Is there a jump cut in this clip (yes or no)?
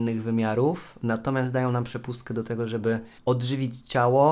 yes